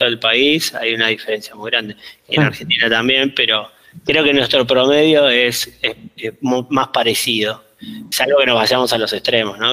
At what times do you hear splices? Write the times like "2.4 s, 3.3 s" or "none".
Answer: 6.2 s

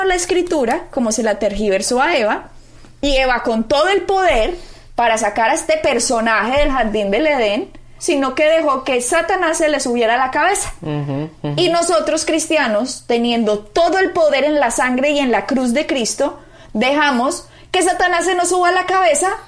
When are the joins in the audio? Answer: 8.0 s

